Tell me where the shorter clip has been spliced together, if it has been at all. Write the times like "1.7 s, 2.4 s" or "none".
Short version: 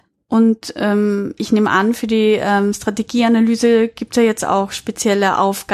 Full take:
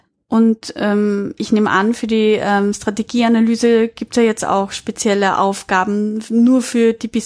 none